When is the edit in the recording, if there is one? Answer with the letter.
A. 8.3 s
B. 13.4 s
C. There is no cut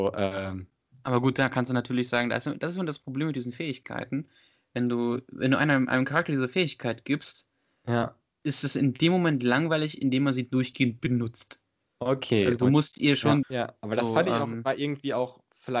B